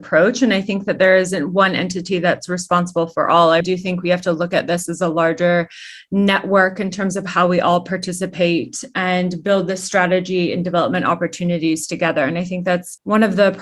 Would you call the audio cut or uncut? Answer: cut